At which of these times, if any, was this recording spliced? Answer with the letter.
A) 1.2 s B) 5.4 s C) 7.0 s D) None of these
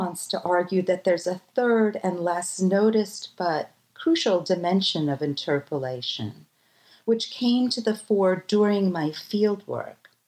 D